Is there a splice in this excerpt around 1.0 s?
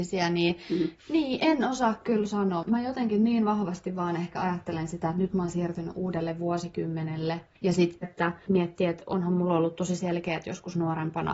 yes; 2 cuts; at 1.0 s, 8.0 s

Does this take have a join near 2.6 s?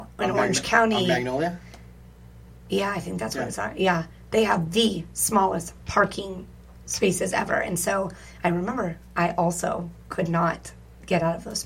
no; 0 cuts

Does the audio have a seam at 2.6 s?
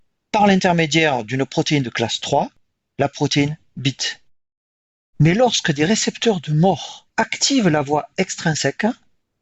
no; 2 cuts; at 5.0 s, 7.1 s

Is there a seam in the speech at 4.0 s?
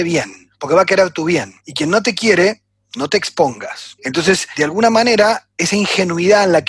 yes; 2 cuts; at 1.6 s, 4.0 s

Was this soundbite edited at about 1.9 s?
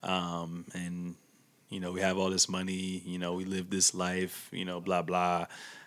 no; 1 cut; at 4.8 s

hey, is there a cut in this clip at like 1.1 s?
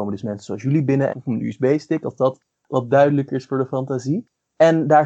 yes; 1 cut; at 1.1 s

